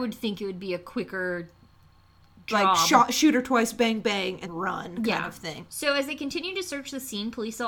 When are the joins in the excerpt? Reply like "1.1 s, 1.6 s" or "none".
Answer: 4.5 s, 5.7 s

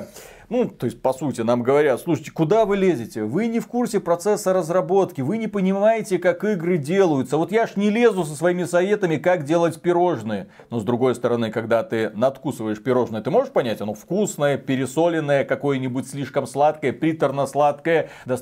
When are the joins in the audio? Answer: none

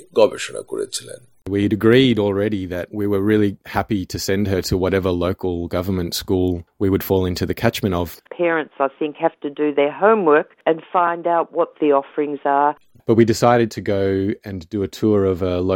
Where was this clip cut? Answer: 8.3 s, 13.0 s

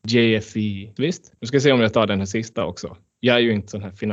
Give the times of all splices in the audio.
1.0 s

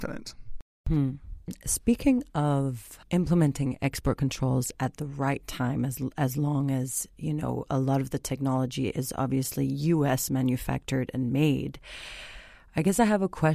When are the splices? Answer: 3.0 s

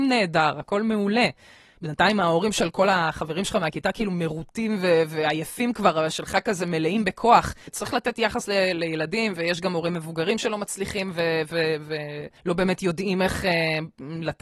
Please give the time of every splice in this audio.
7.7 s, 12.4 s

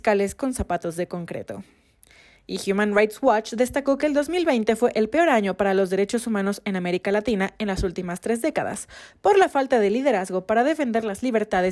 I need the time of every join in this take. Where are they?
none

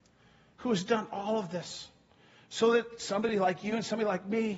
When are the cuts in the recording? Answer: none

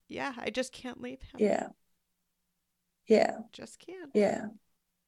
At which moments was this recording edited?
3.5 s

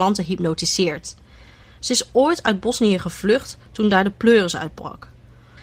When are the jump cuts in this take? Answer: none

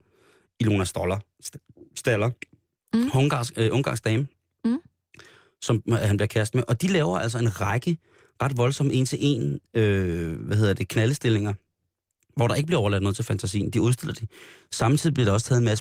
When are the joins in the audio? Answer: none

